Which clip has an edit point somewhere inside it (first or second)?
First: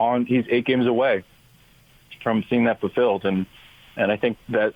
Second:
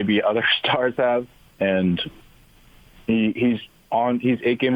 second